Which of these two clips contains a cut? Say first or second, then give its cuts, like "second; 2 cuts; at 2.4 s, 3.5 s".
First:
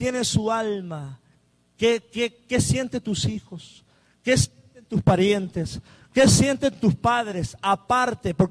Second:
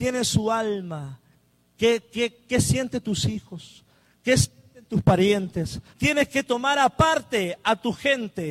second; 1 cut; at 5.9 s